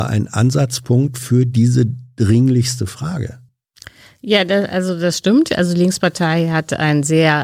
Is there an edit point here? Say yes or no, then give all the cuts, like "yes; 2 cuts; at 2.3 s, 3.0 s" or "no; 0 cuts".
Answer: no; 0 cuts